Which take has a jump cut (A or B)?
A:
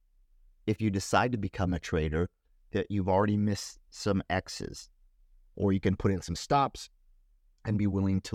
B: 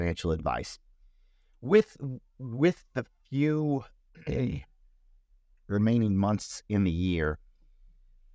A